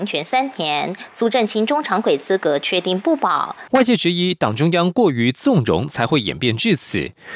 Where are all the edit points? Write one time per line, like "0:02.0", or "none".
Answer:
0:03.7

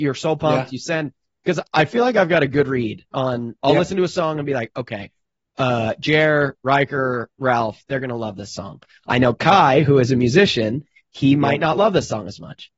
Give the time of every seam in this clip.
none

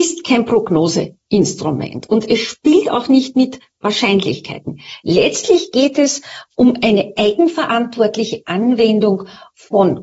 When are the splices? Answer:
none

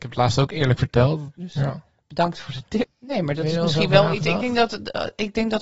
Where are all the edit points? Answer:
0:01.4
0:02.8

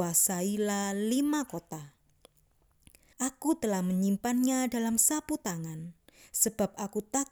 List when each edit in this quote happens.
0:03.1

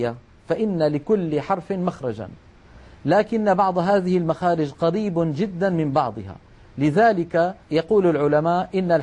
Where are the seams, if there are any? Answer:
0:07.6

